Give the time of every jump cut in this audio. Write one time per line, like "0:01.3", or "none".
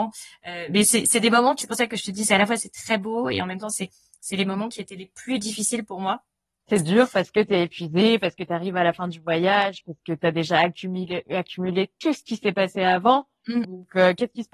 0:01.6
0:13.6